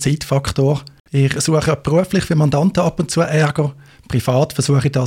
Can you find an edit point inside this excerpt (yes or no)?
no